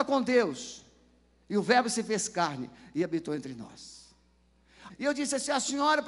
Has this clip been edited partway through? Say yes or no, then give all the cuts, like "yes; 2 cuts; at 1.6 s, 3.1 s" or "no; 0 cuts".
yes; 1 cut; at 4.9 s